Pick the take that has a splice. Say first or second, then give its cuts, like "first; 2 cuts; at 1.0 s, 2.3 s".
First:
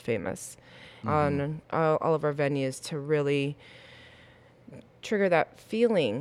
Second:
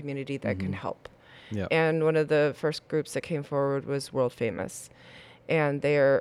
first; 1 cut; at 1.0 s